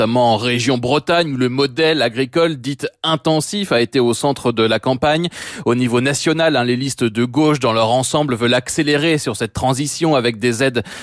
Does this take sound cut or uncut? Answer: uncut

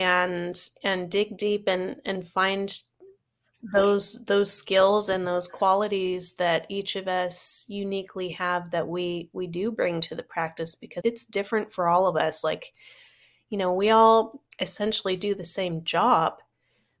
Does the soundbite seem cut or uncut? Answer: cut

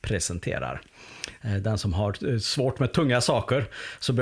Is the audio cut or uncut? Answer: cut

